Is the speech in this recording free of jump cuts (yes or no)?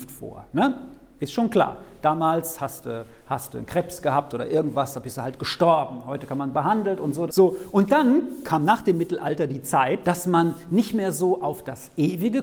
no